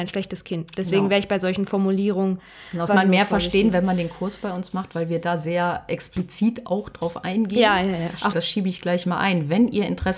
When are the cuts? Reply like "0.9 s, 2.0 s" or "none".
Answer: 2.9 s, 8.3 s